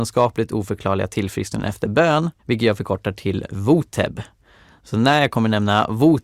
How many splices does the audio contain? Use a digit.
1